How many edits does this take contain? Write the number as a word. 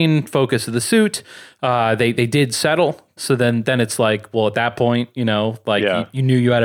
one